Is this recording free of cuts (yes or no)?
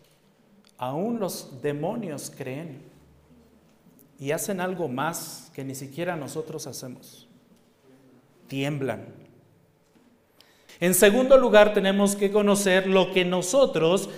no